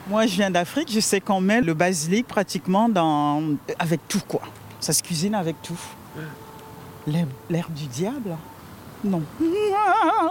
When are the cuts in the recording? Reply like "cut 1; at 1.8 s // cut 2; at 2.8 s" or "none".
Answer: cut 1; at 1.6 s